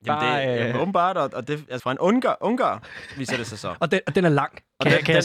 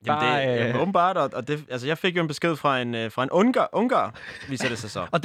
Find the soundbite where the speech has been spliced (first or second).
first